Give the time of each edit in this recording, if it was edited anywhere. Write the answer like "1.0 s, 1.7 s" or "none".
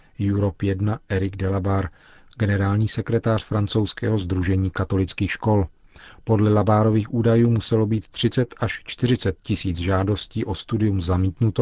none